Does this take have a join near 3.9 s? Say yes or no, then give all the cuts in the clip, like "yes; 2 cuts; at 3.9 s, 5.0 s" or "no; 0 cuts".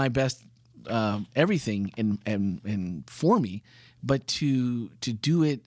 no; 0 cuts